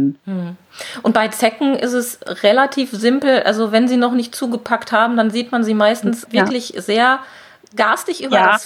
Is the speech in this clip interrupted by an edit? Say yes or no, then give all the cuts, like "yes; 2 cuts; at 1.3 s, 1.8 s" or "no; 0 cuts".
yes; 1 cut; at 6.3 s